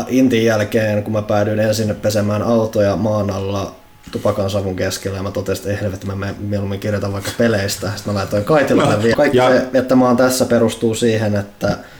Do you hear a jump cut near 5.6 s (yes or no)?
no